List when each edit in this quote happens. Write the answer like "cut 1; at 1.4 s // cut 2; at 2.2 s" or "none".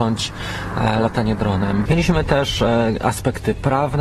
cut 1; at 1.9 s